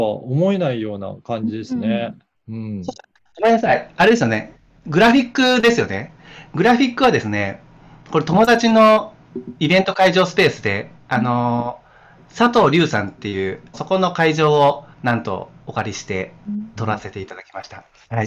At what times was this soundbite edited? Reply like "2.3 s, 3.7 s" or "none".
13.7 s, 14.9 s